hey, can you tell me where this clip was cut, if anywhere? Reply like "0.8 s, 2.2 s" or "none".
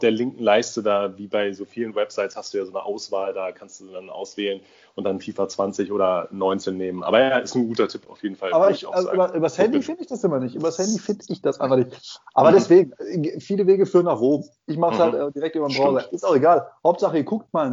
none